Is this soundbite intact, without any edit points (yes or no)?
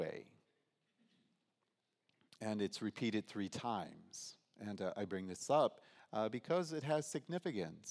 yes